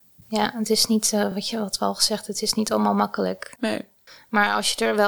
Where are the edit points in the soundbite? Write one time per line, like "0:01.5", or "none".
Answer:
none